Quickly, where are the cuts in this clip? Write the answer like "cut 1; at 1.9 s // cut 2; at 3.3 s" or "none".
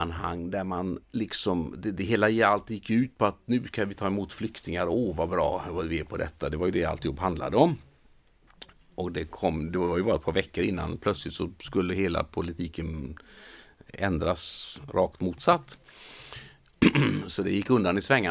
cut 1; at 1.0 s